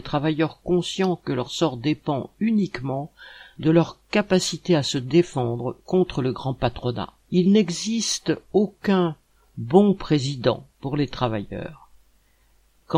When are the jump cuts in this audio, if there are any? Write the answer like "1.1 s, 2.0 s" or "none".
7.2 s, 10.7 s